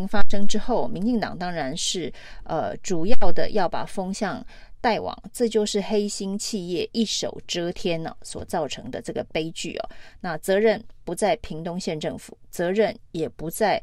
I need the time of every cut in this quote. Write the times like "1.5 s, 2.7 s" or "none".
none